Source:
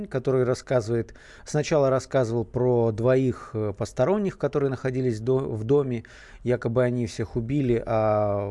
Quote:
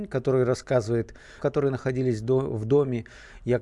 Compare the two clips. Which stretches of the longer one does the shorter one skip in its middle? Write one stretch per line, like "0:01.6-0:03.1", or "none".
0:01.4-0:04.4